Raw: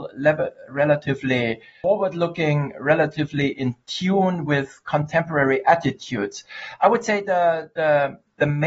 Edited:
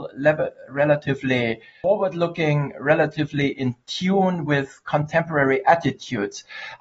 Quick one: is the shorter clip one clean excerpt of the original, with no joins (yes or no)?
yes